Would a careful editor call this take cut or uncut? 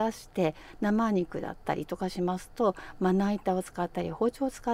uncut